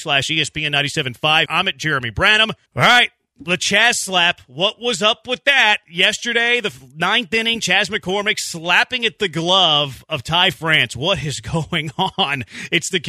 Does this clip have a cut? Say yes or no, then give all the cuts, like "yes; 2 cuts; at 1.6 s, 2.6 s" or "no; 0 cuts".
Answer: yes; 2 cuts; at 1.5 s, 2.7 s